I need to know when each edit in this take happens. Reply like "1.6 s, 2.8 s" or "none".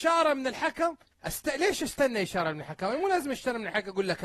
none